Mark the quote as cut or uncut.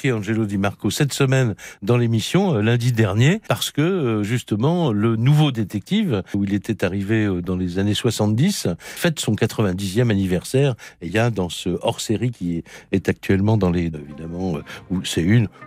cut